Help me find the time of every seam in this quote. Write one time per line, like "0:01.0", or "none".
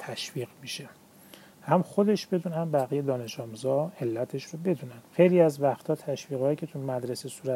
0:05.1